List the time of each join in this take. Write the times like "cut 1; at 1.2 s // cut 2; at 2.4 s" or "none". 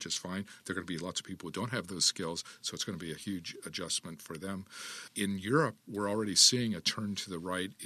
none